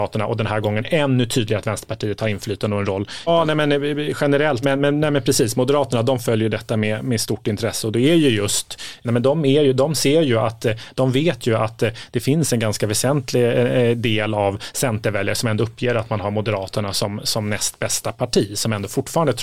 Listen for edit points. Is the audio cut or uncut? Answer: cut